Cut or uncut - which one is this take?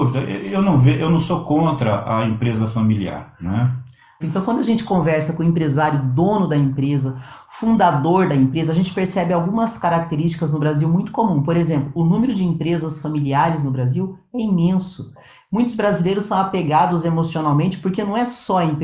cut